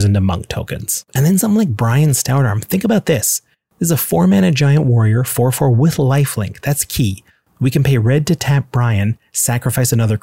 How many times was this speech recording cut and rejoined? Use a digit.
0